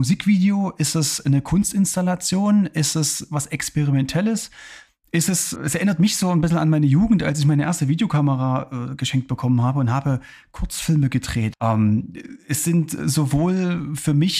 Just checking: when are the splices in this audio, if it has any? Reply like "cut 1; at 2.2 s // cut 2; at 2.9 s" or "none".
cut 1; at 5.6 s // cut 2; at 11.5 s